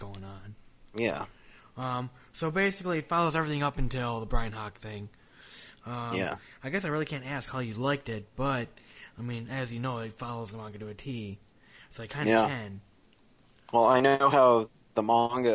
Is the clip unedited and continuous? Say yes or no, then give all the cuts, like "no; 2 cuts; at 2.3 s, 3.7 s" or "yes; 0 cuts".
yes; 0 cuts